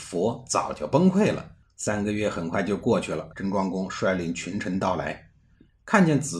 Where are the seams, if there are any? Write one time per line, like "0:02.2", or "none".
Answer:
0:01.6
0:03.3